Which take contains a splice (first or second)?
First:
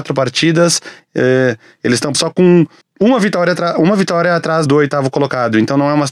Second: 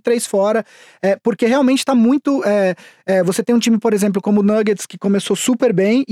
first